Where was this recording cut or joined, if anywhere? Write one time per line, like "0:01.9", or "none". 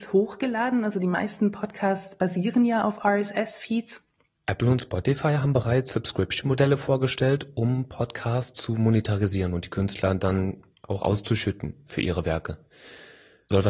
0:04.4

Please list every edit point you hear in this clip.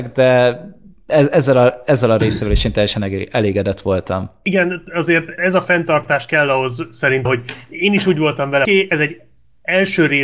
0:05.4
0:07.3
0:08.7

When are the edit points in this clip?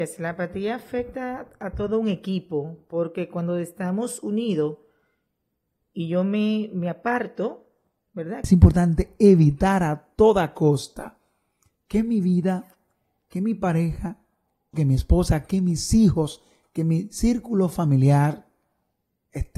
0:08.4
0:14.7

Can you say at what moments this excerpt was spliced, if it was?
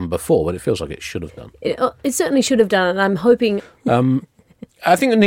0:03.6

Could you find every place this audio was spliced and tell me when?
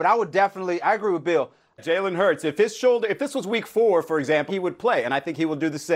0:01.8
0:04.5

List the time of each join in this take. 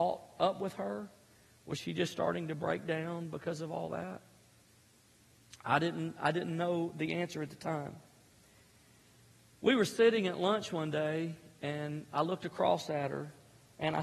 none

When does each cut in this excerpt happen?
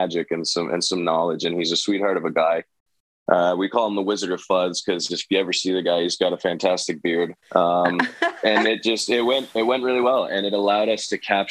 0:07.4

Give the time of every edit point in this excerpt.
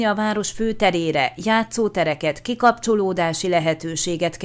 none

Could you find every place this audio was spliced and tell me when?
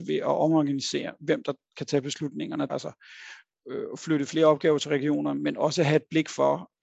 0:02.7

